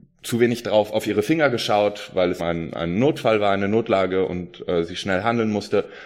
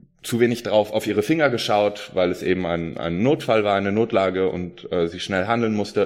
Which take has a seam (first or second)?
first